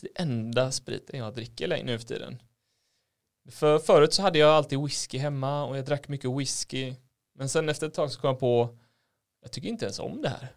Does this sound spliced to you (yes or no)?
no